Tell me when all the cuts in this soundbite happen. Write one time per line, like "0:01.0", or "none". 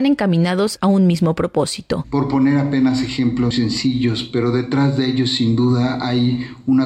0:02.0
0:03.5

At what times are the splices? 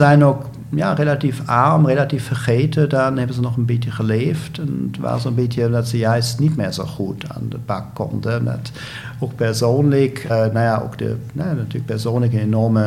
0:10.3

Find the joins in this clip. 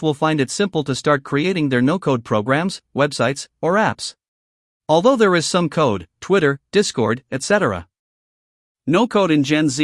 0:04.8
0:06.1

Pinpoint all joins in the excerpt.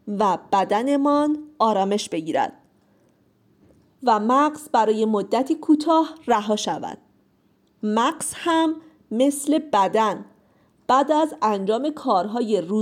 none

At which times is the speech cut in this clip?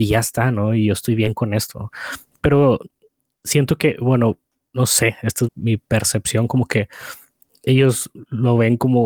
0:05.5

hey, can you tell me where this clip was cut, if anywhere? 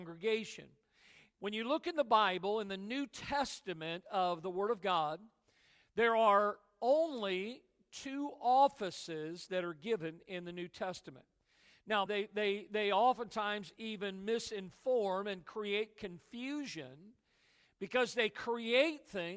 0:12.1

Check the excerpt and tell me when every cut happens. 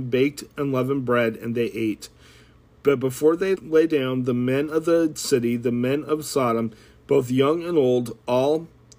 0:03.5

